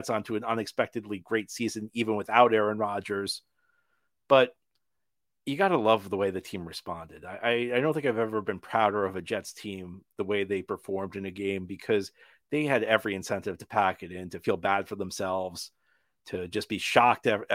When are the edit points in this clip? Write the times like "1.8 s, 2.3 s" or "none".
none